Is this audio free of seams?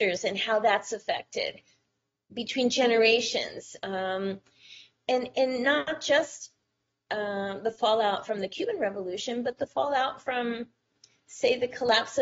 yes; 0 cuts

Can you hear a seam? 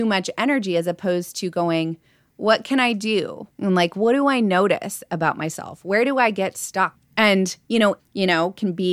yes; 3 cuts; at 3.5 s, 6.9 s, 8.0 s

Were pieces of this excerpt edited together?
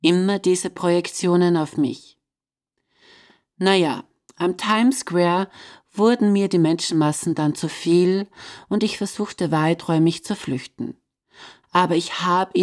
yes; 1 cut; at 11.6 s

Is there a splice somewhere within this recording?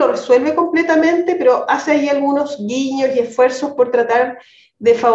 no; 0 cuts

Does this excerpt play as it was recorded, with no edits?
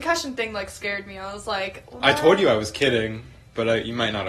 yes; 0 cuts

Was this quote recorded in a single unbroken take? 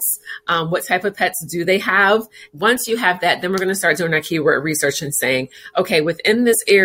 no; 1 cut; at 2.5 s

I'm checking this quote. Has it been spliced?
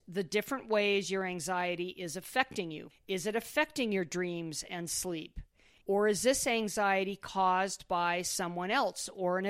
yes; 2 cuts; at 2.9 s, 5.8 s

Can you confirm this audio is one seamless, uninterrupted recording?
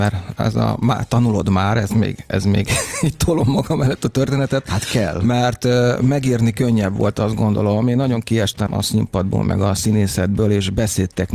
no; 1 cut; at 8.7 s

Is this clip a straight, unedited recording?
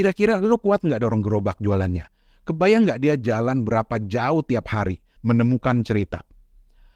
no; 1 cut; at 5.2 s

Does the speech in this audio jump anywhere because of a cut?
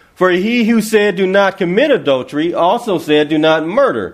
no; 0 cuts

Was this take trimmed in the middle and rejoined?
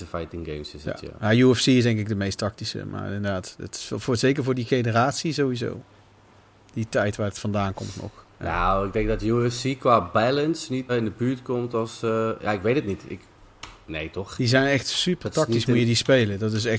yes; 2 cuts; at 10.9 s, 14.4 s

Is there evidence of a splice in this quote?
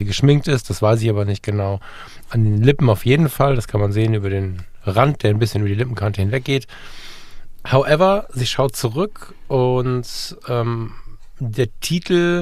no; 0 cuts

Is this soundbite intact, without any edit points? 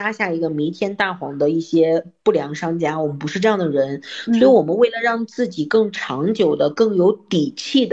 yes; 0 cuts

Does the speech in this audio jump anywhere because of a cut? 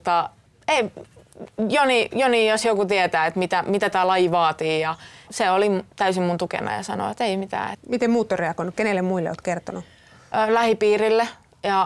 yes; 1 cut; at 7.7 s

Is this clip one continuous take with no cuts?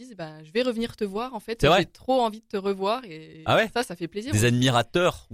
yes; 0 cuts

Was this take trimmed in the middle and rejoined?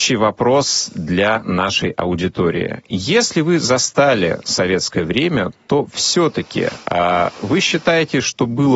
no; 0 cuts

